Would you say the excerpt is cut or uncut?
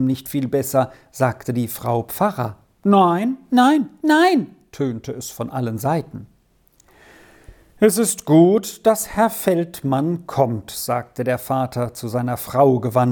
cut